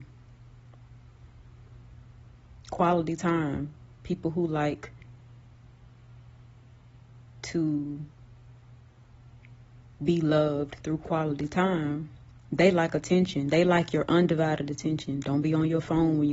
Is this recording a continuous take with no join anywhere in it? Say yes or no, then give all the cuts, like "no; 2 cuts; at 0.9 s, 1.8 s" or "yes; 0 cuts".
no; 1 cut; at 15.2 s